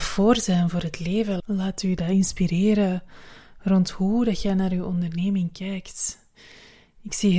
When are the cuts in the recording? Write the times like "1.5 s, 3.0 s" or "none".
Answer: 1.4 s

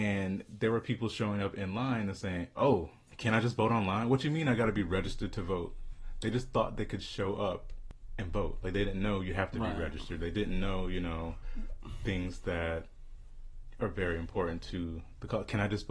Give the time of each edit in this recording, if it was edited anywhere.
none

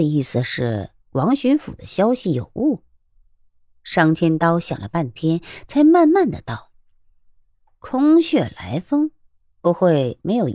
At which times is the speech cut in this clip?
none

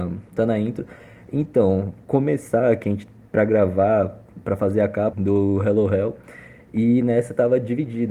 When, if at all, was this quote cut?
5.1 s

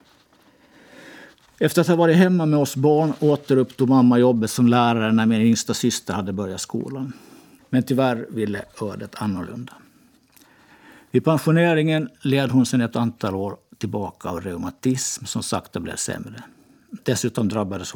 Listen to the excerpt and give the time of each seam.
7.6 s

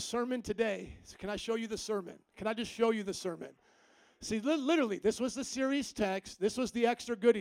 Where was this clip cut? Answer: none

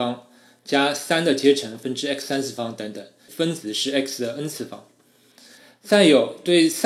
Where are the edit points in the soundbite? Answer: 3.3 s

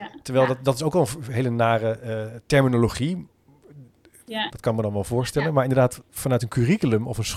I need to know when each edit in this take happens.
4.5 s, 6.1 s

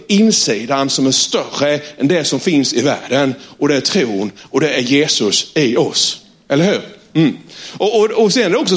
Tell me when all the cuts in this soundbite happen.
none

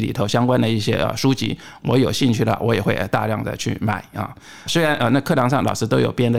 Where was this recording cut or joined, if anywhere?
4.7 s

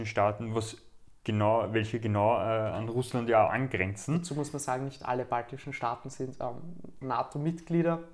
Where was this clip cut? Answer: 1.2 s, 7.0 s

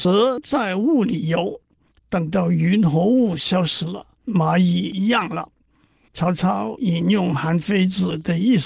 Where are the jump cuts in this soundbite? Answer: 4.2 s

